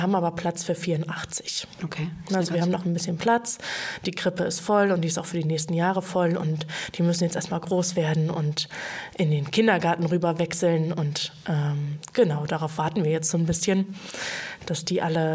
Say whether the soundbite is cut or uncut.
uncut